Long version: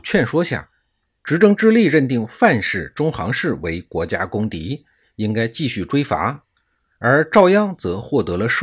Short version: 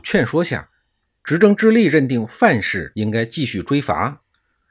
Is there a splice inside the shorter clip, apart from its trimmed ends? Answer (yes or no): yes